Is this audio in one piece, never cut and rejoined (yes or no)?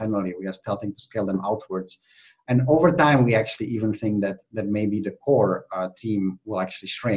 yes